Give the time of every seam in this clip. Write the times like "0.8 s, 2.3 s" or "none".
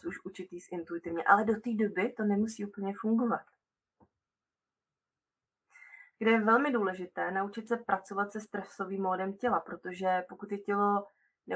6.1 s